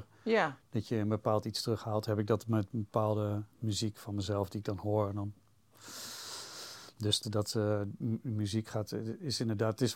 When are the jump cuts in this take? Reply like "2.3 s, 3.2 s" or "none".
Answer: 7.2 s